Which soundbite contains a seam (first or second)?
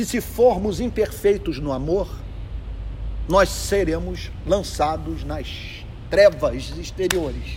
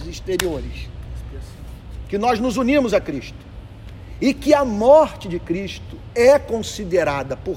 second